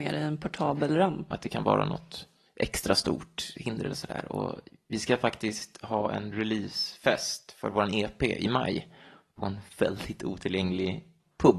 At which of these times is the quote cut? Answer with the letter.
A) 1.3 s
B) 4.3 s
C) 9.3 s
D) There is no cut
A